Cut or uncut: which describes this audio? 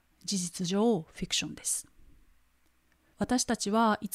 cut